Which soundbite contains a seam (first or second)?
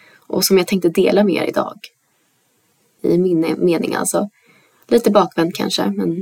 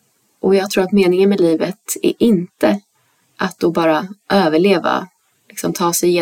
first